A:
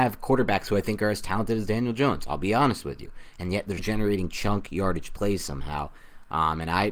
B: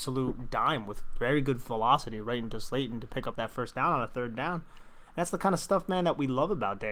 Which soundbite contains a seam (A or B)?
A